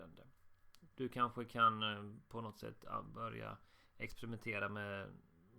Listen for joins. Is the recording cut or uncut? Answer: cut